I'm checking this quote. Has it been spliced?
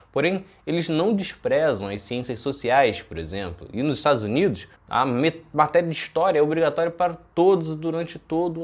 yes; 1 cut; at 4.8 s

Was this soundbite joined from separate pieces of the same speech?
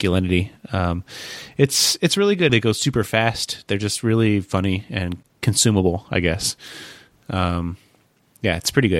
yes; 1 cut; at 2.5 s

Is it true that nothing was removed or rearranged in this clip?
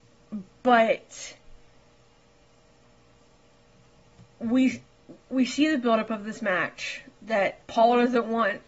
no; 2 cuts; at 5.2 s, 7.6 s

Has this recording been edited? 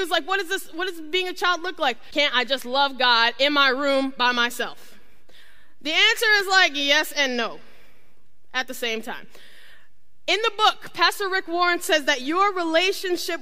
yes; 1 cut; at 2.1 s

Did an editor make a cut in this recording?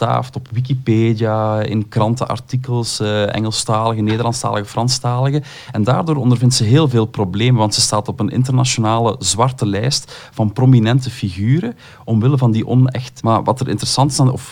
yes; 1 cut; at 13.2 s

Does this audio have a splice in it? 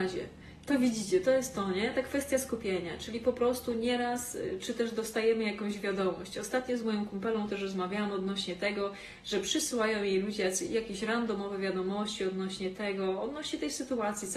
no; 0 cuts

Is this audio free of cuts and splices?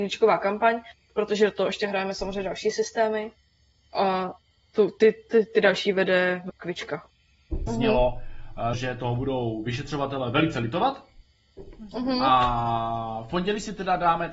no; 2 cuts; at 7.7 s, 8.7 s

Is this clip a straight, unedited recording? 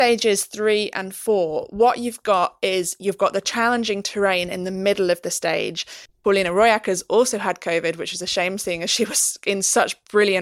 no; 1 cut; at 6.1 s

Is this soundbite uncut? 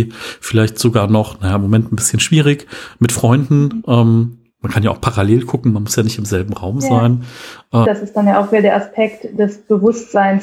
no; 1 cut; at 7.8 s

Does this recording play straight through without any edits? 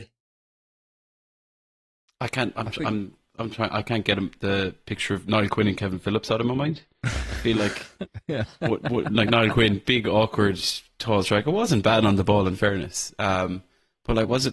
yes; 0 cuts

